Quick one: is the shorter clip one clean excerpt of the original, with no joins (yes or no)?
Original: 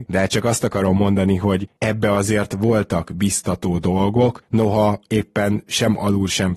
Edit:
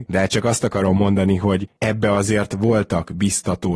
yes